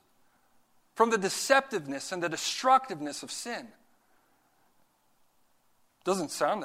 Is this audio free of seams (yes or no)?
yes